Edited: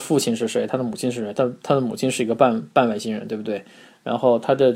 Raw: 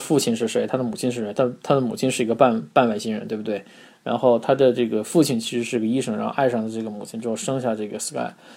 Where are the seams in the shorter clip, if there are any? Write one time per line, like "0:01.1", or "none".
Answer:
none